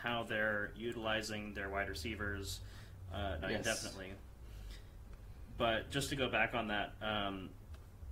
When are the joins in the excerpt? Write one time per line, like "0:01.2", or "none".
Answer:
0:03.4

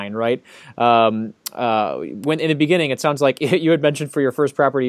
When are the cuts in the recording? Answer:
none

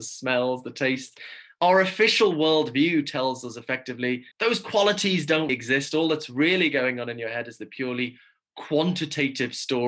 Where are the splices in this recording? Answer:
0:04.3
0:05.5

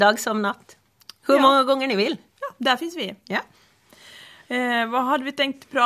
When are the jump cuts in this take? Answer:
none

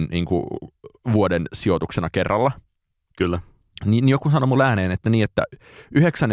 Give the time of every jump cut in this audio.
none

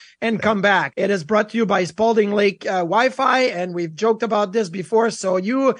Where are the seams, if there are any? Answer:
0:00.9

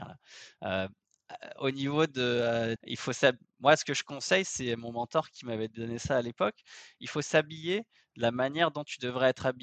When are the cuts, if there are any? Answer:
0:02.8

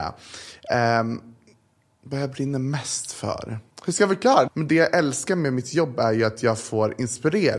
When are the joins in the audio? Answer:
0:04.5

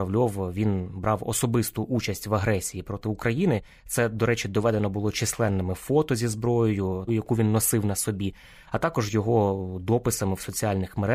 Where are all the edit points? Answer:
0:07.1

